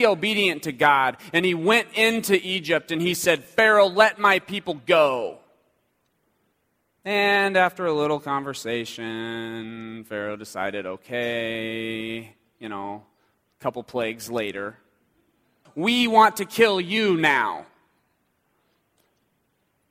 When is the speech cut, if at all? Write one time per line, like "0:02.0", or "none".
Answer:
0:15.6